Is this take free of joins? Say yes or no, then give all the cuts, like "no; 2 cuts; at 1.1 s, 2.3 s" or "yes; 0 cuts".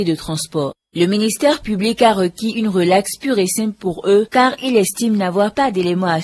yes; 0 cuts